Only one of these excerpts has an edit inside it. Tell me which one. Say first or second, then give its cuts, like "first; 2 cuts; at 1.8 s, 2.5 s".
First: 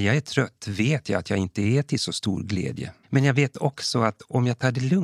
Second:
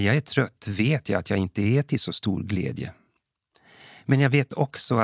first; 1 cut; at 3.0 s